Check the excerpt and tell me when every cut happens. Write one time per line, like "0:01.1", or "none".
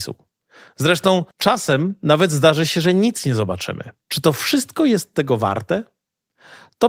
0:01.3
0:04.0